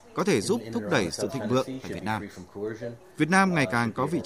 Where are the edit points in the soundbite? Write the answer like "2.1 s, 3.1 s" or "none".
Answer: none